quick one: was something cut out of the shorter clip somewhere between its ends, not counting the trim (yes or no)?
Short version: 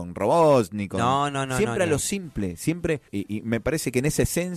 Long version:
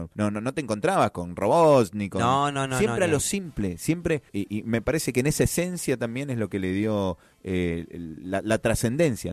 no